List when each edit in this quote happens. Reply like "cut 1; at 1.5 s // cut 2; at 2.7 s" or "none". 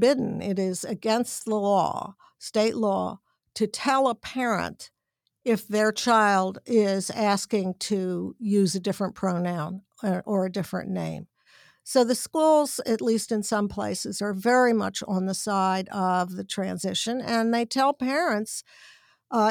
none